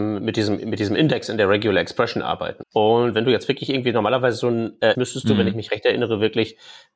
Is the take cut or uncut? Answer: cut